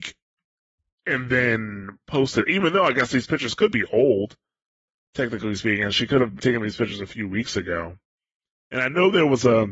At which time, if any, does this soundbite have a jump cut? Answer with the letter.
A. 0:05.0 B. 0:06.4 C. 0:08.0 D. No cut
B